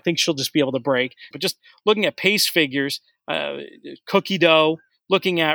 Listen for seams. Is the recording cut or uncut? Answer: cut